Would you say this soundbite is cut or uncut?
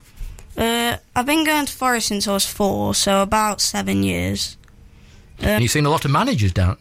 cut